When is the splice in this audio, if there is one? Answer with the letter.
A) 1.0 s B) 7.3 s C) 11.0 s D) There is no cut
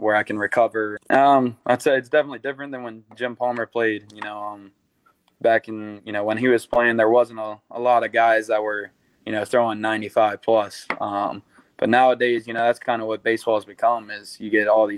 A